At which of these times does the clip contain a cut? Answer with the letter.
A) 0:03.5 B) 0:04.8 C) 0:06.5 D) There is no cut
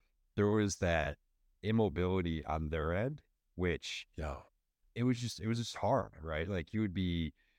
B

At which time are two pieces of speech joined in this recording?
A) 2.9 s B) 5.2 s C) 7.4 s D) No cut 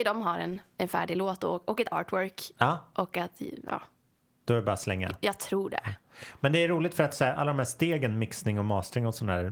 C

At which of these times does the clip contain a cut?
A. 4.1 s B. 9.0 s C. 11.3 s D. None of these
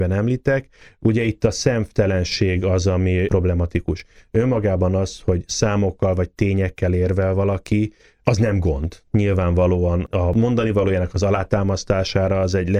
D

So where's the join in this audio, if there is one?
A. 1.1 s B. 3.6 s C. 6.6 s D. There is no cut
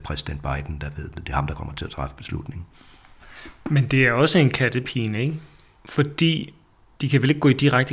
D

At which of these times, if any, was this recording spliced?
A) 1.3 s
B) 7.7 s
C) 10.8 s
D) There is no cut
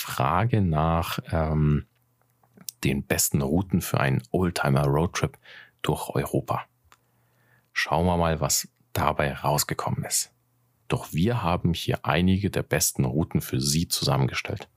C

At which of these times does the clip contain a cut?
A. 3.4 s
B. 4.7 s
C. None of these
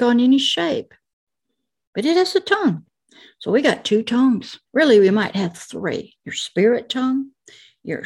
B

